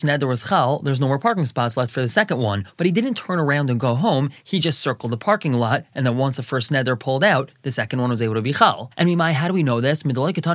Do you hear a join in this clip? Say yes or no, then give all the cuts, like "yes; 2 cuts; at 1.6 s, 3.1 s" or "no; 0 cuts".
no; 0 cuts